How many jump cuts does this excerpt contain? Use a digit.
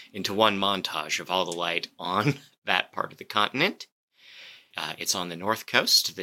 1